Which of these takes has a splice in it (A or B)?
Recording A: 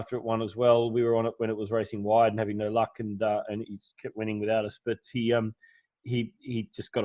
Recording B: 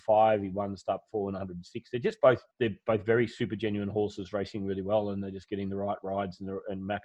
B